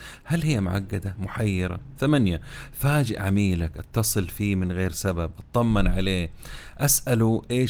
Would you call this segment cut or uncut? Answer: cut